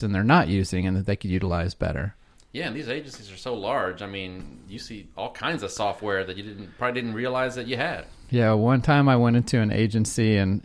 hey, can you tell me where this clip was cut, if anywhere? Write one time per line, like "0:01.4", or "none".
none